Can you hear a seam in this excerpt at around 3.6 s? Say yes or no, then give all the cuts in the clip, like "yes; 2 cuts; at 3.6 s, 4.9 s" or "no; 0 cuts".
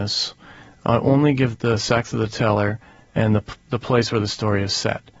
yes; 2 cuts; at 1.5 s, 3.6 s